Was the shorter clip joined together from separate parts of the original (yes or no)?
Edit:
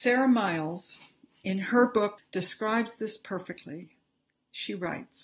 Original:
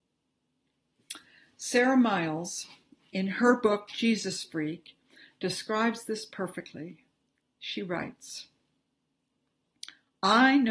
yes